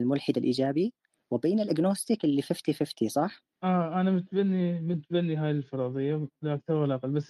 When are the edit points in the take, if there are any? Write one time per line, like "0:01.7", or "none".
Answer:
0:03.5